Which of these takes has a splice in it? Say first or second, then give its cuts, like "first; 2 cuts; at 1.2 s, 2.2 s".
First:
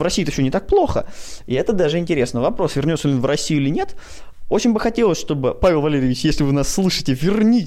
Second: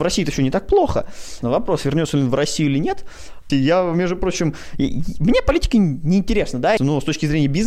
second; 3 cuts; at 1.4 s, 3.5 s, 6.8 s